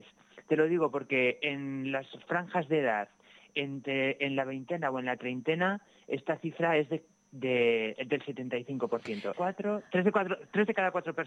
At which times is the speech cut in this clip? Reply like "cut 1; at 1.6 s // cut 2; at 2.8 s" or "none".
cut 1; at 9.3 s